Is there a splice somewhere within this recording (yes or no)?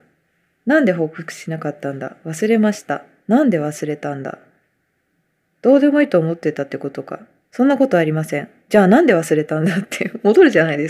no